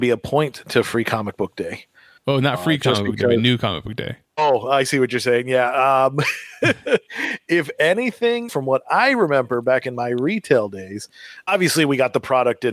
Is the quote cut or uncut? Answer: cut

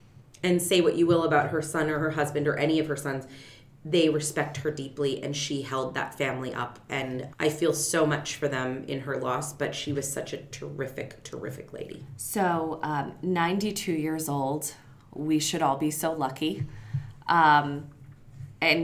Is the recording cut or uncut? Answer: cut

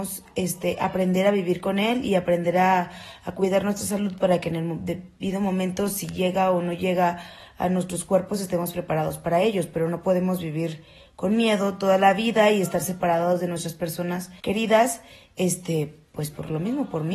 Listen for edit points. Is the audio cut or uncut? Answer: cut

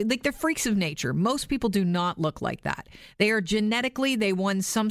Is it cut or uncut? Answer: uncut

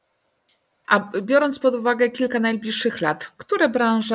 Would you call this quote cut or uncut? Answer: uncut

